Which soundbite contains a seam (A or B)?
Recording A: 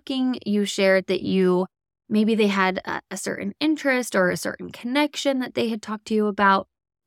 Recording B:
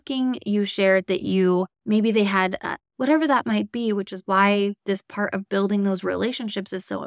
B